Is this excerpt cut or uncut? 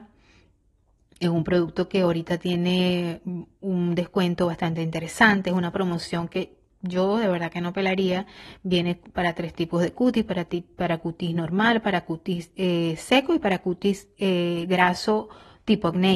uncut